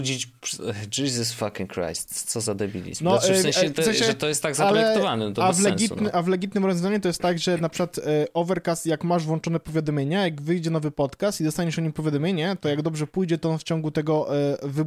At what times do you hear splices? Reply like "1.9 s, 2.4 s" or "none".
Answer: none